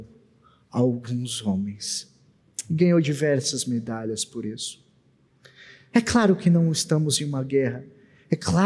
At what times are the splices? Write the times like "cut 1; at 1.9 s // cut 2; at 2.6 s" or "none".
none